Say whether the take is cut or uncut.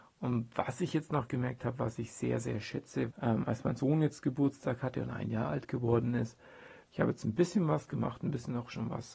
cut